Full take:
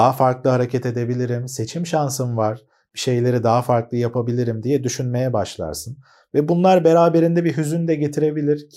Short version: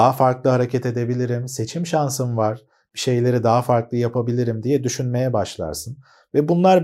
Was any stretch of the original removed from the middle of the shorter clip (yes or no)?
no